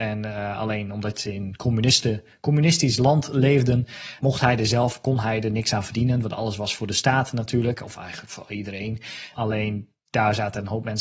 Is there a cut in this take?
yes; 2 cuts; at 4.2 s, 9.3 s

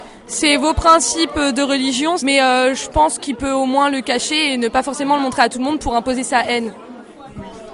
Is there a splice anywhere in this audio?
yes; 1 cut; at 2.2 s

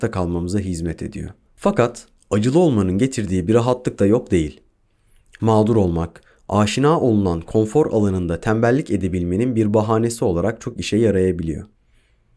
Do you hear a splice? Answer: yes; 1 cut; at 1.5 s

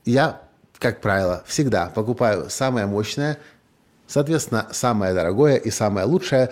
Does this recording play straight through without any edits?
yes; 0 cuts

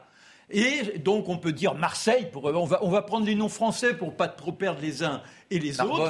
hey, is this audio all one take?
yes; 0 cuts

